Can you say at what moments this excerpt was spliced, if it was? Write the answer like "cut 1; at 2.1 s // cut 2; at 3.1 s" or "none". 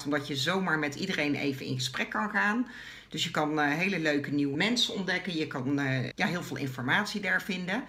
cut 1; at 4.5 s // cut 2; at 6.1 s